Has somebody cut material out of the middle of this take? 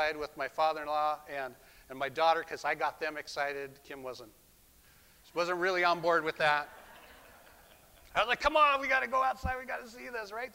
no; 0 cuts

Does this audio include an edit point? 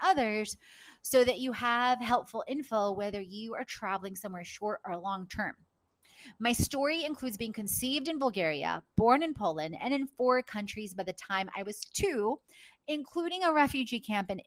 no; 0 cuts

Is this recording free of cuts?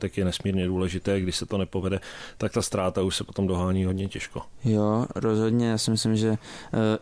yes; 0 cuts

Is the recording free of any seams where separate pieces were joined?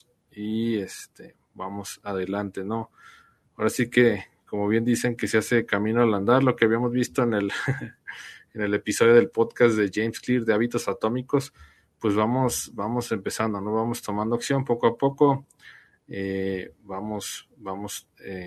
yes; 0 cuts

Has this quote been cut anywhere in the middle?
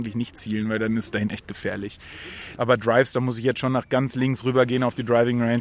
yes; 2 cuts; at 1.3 s, 2.6 s

